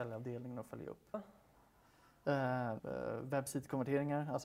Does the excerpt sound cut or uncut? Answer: cut